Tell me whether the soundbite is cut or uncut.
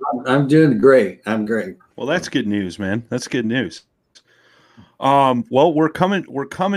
cut